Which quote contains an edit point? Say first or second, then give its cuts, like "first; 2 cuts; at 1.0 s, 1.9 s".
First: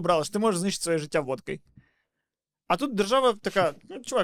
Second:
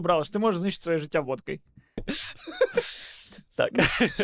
second; 1 cut; at 2.0 s